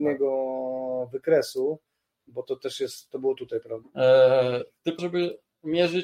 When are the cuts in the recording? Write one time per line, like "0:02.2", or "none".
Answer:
0:03.8
0:05.0